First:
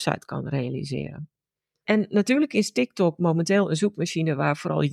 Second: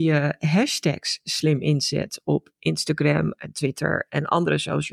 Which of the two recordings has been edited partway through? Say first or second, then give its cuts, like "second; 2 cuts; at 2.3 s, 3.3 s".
first; 1 cut; at 1.8 s